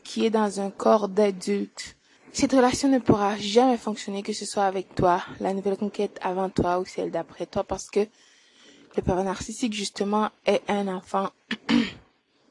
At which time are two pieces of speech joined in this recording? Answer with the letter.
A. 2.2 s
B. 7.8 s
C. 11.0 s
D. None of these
A